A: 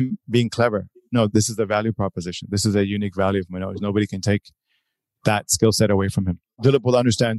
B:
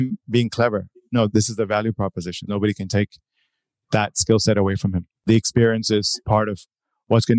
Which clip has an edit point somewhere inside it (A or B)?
B